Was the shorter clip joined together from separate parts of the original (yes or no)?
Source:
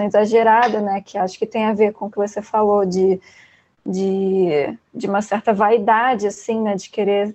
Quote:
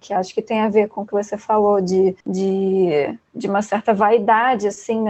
yes